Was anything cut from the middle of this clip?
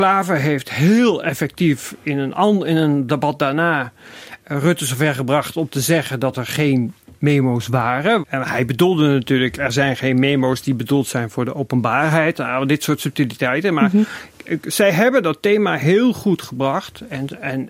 yes; 1 cut; at 8.2 s

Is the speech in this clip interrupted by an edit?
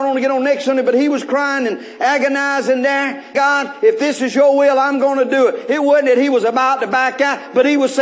yes; 1 cut; at 3.3 s

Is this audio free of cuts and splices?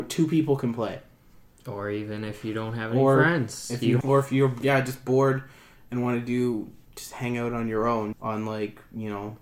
no; 2 cuts; at 4.0 s, 8.1 s

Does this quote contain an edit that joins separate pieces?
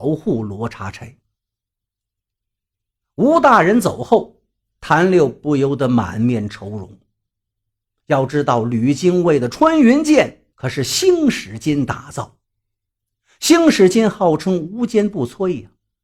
yes; 1 cut; at 10.5 s

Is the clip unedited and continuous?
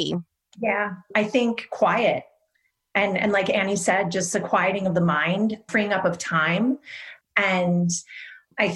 no; 1 cut; at 7.2 s

